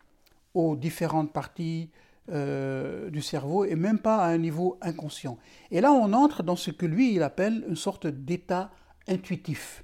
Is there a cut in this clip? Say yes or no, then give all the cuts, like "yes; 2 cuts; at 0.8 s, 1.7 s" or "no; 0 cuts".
no; 0 cuts